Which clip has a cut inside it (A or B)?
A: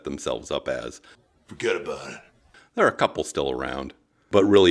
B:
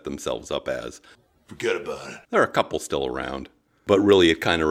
B